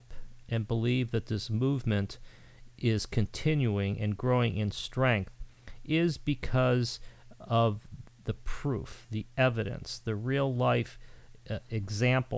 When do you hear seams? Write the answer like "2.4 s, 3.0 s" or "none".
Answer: none